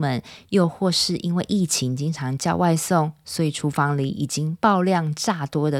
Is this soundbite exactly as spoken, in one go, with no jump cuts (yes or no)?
yes